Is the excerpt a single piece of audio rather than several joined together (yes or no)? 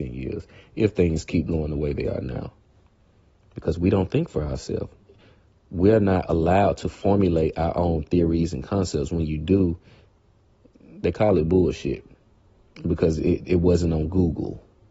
yes